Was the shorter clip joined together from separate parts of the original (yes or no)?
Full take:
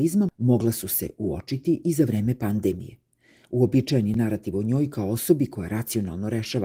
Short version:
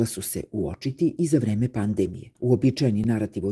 yes